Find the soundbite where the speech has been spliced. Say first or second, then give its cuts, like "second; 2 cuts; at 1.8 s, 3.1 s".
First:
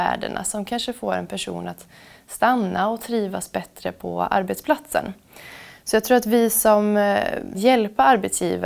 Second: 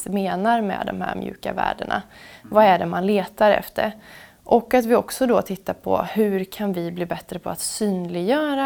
first; 1 cut; at 7.5 s